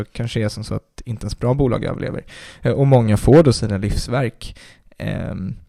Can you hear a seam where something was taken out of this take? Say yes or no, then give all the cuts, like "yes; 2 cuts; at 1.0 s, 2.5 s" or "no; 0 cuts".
no; 0 cuts